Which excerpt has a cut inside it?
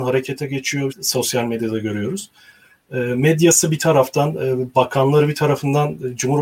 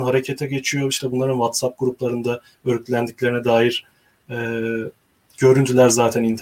first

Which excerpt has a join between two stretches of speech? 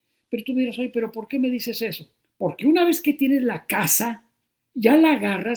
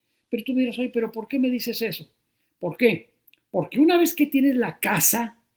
first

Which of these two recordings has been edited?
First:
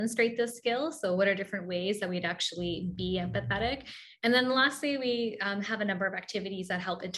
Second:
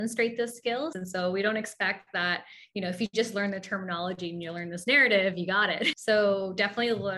second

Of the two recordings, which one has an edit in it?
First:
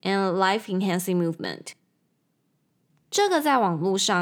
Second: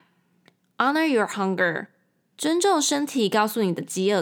first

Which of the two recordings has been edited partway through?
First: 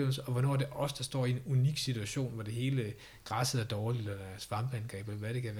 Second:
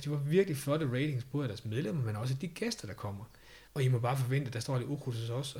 second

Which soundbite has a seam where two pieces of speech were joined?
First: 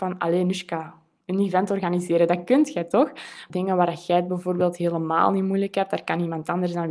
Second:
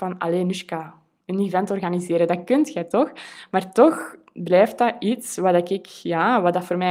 first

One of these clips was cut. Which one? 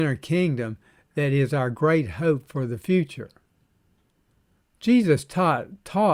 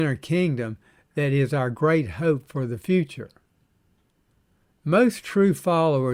first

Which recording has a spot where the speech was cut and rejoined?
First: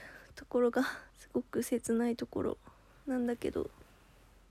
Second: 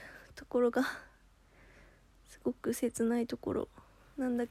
first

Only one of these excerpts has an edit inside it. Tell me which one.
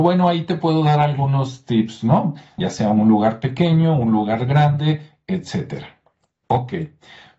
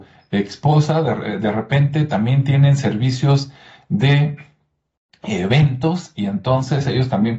first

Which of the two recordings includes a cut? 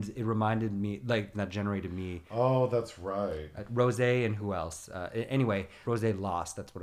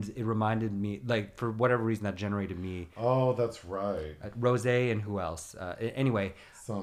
first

